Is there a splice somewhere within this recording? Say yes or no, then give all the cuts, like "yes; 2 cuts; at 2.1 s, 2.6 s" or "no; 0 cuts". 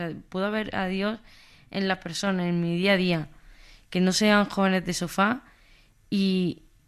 no; 0 cuts